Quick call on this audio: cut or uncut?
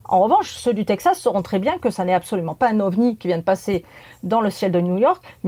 uncut